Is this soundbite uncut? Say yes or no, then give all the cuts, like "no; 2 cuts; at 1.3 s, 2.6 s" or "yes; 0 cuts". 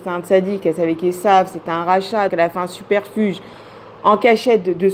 no; 1 cut; at 2.3 s